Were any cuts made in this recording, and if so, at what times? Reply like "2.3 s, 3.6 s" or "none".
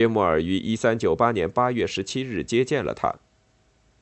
none